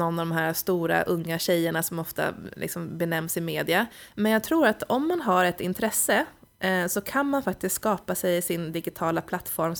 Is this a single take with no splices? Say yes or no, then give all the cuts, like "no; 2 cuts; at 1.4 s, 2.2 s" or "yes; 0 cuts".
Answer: yes; 0 cuts